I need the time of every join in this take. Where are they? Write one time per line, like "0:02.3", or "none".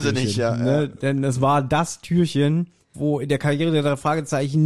0:02.9